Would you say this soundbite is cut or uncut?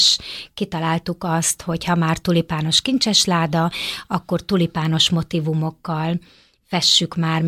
uncut